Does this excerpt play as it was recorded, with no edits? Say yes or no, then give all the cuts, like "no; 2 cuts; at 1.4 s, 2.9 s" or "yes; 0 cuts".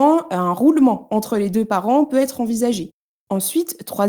no; 1 cut; at 3.1 s